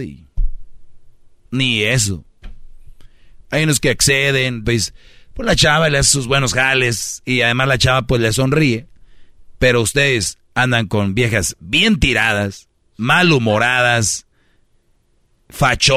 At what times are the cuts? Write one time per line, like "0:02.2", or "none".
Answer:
0:04.6